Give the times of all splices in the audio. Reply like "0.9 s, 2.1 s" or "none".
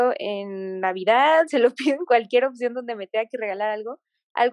none